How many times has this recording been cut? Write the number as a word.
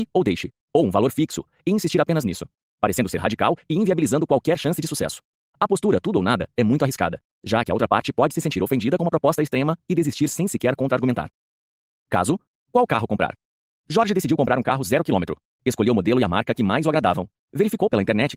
zero